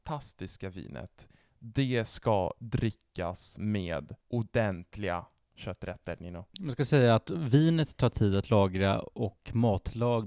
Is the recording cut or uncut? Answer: cut